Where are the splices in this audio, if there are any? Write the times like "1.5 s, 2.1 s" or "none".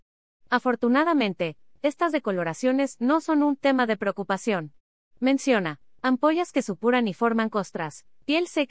1.8 s, 5.0 s